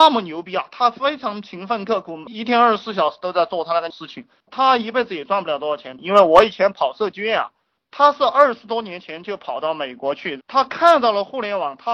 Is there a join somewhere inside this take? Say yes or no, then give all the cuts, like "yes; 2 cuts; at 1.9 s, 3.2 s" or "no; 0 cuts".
yes; 2 cuts; at 7.8 s, 10.4 s